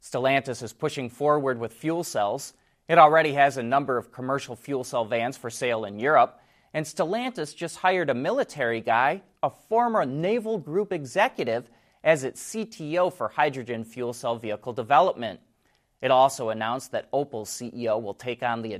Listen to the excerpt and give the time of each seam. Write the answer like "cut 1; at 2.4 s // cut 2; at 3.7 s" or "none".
none

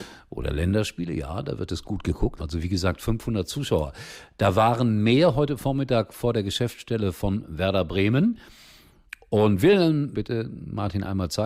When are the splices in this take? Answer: cut 1; at 2.4 s // cut 2; at 10.1 s

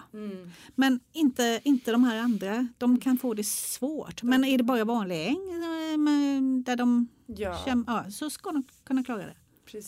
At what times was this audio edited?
none

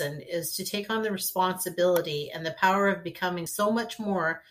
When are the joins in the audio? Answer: none

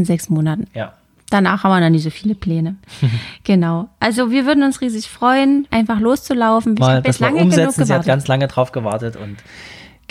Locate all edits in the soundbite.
cut 1; at 5.7 s // cut 2; at 6.8 s

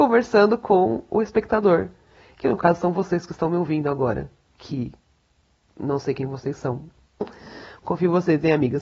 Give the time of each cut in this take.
cut 1; at 7.2 s

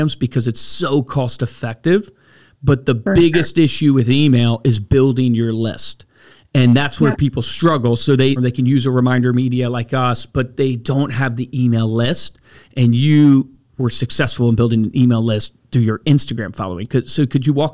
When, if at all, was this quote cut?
cut 1; at 8.4 s

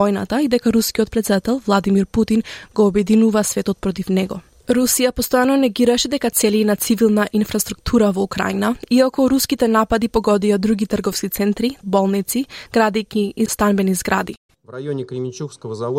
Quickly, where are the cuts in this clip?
cut 1; at 4.6 s // cut 2; at 11.8 s // cut 3; at 14.5 s

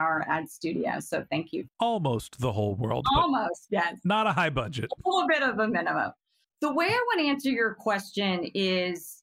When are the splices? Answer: none

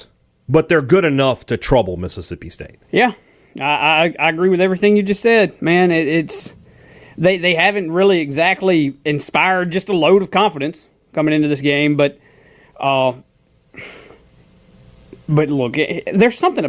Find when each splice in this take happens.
cut 1; at 2.8 s

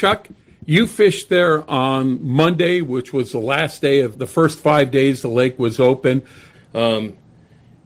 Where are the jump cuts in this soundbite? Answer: cut 1; at 4.1 s // cut 2; at 6.5 s

